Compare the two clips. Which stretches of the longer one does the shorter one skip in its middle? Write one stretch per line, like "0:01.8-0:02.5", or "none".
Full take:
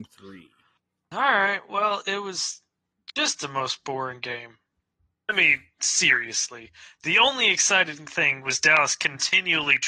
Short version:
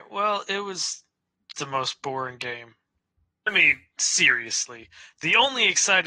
0:03.1-0:03.4